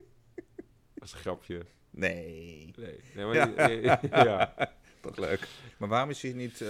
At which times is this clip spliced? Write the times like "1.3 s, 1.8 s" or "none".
5.7 s